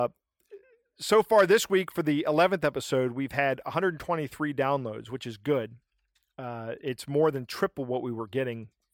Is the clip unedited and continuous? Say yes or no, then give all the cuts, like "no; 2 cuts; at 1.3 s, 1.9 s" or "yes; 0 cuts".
yes; 0 cuts